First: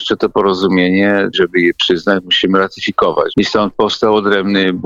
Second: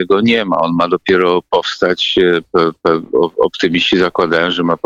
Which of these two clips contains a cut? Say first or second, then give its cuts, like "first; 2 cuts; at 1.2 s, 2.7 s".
first; 2 cuts; at 1.3 s, 3.3 s